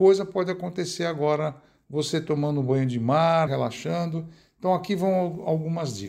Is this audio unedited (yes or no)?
no